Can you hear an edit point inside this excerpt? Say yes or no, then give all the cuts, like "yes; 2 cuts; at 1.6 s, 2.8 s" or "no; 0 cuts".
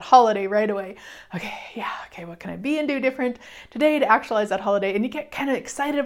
no; 0 cuts